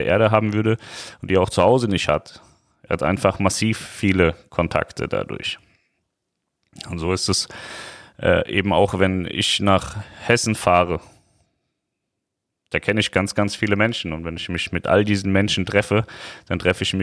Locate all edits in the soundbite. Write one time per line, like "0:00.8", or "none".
none